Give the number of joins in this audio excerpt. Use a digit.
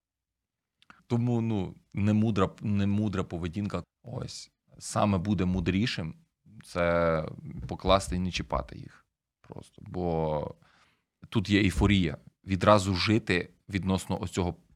2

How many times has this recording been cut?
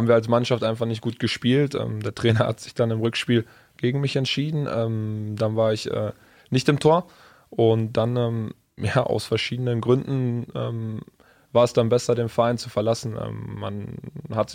0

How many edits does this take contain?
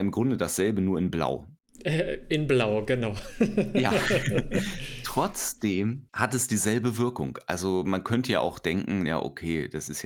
0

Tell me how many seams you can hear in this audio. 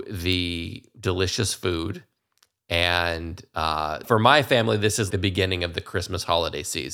2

